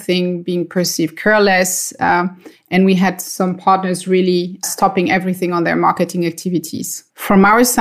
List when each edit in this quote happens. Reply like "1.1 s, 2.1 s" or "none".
none